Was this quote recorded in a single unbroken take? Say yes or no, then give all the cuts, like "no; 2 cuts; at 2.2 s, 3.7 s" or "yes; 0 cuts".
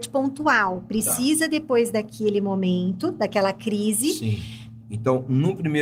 no; 1 cut; at 4.8 s